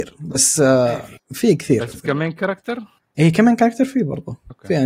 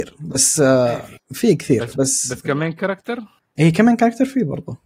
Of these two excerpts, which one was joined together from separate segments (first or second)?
first